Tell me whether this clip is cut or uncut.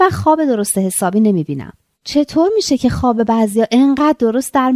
cut